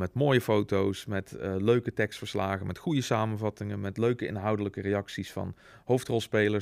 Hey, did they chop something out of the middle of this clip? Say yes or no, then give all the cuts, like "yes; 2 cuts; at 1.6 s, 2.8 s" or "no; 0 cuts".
no; 0 cuts